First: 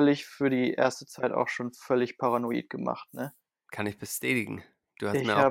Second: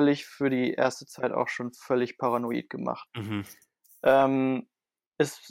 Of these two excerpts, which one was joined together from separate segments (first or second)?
second